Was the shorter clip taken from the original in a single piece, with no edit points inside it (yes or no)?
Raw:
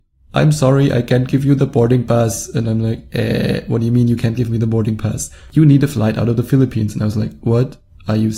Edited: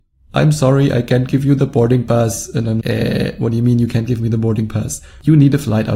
no